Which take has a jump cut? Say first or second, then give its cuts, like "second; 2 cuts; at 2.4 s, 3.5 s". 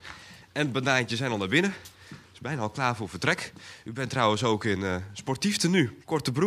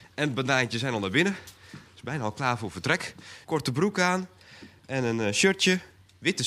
second; 1 cut; at 3.4 s